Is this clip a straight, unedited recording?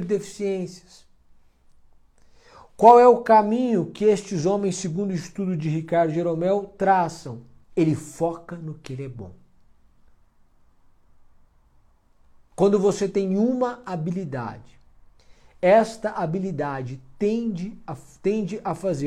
no; 1 cut; at 7.6 s

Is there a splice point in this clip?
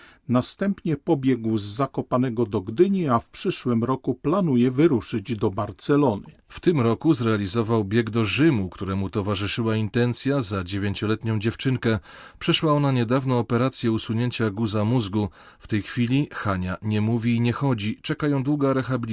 no; 0 cuts

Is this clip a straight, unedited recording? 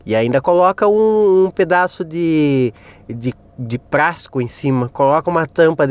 yes; 0 cuts

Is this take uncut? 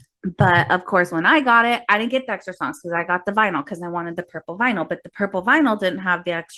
yes; 0 cuts

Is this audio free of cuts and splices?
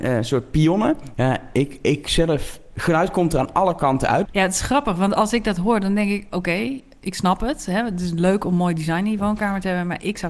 no; 3 cuts; at 1.2 s, 2.7 s, 4.3 s

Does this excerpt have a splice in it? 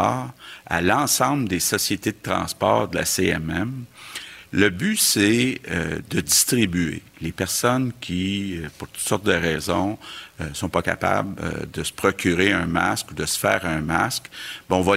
no; 0 cuts

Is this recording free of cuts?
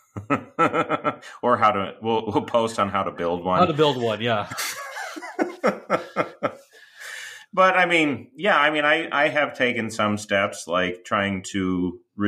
yes; 0 cuts

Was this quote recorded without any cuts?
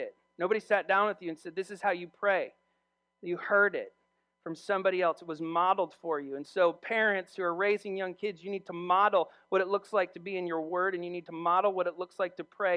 yes; 0 cuts

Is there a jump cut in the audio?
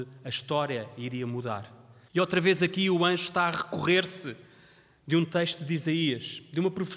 yes; 1 cut; at 2.1 s

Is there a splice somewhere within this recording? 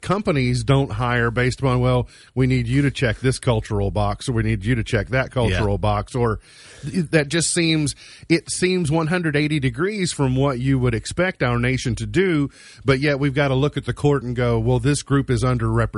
no; 0 cuts

